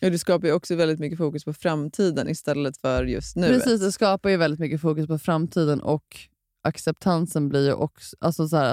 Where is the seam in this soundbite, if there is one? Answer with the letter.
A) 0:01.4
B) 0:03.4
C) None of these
C